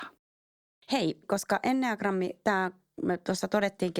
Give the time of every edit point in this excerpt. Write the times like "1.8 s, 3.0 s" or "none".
1.2 s